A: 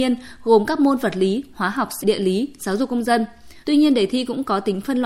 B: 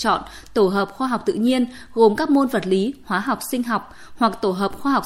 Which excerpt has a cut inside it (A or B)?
A